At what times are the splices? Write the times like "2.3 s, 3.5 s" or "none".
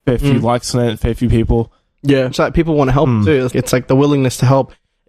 2.3 s, 3.5 s